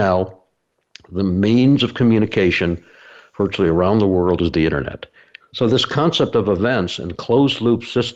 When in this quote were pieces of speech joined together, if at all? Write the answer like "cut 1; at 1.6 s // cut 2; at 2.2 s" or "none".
cut 1; at 5.4 s

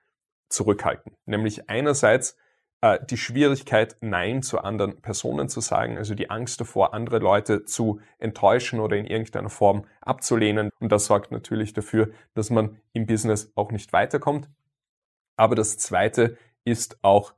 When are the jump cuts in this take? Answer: cut 1; at 10.7 s

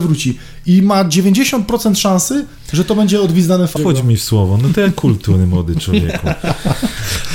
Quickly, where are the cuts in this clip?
cut 1; at 3.8 s

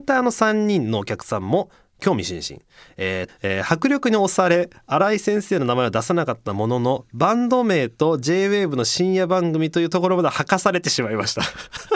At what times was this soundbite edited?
cut 1; at 3.3 s

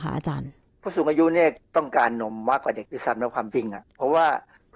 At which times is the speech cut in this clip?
none

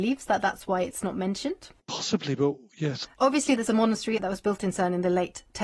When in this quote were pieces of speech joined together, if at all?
cut 1; at 3.0 s // cut 2; at 4.2 s

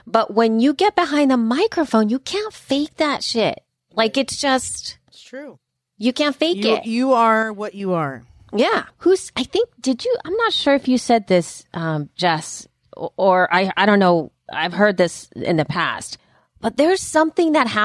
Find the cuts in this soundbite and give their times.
cut 1; at 8.9 s

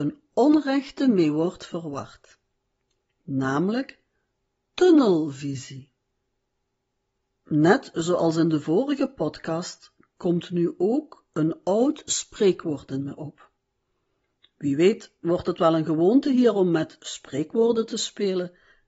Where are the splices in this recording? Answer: none

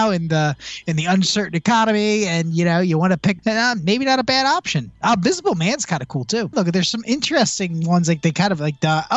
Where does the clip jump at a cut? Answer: cut 1; at 3.4 s // cut 2; at 6.5 s

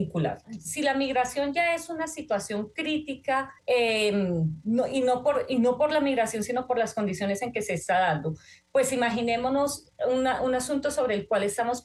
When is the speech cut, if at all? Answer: cut 1; at 3.6 s

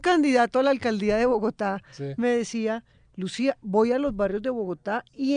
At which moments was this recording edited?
none

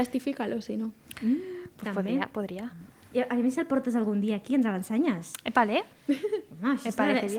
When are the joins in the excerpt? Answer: none

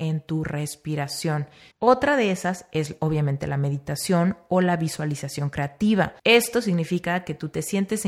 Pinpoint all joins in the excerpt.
cut 1; at 1.7 s // cut 2; at 6.2 s

